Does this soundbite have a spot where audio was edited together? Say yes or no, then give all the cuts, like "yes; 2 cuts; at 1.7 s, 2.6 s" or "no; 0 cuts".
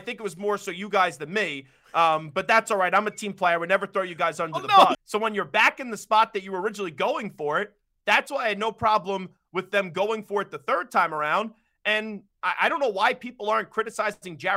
yes; 1 cut; at 4.9 s